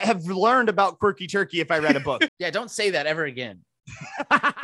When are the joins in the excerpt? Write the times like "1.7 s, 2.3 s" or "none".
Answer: 2.3 s